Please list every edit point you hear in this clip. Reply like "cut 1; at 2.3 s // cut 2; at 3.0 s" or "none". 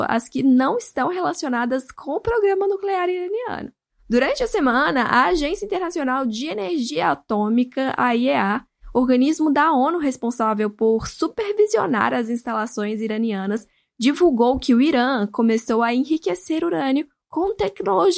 none